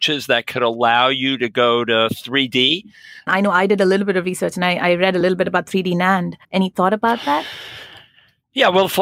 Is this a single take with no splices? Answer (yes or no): no